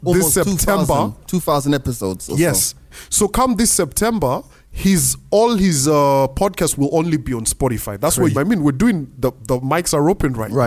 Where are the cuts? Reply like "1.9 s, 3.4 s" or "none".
8.3 s